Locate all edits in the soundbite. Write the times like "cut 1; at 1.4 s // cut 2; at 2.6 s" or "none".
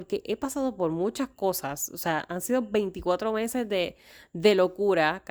none